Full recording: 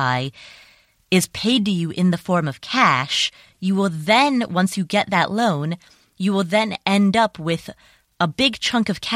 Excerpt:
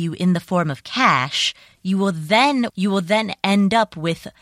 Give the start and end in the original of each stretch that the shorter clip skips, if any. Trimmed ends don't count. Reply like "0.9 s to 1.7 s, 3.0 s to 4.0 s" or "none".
4.5 s to 6.1 s